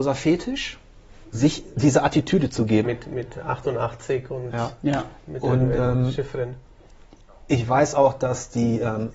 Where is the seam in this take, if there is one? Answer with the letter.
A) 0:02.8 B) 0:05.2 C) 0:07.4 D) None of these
A